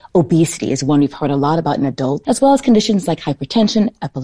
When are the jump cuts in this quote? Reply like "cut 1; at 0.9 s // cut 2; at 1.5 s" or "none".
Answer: cut 1; at 2.2 s